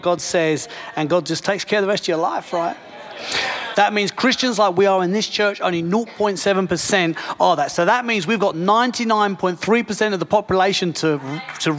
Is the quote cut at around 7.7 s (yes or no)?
no